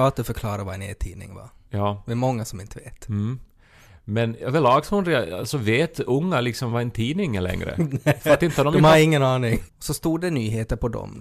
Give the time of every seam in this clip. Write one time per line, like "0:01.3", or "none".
0:09.7